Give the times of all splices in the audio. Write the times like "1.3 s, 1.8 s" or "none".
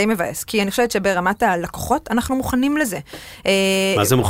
none